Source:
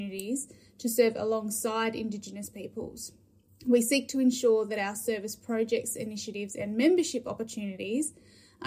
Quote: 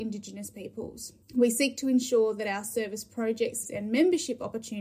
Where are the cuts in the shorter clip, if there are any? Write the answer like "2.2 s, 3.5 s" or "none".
1.2 s, 3.6 s